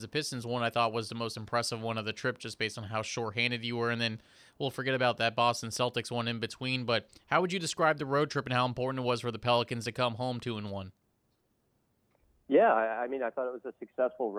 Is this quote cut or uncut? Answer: uncut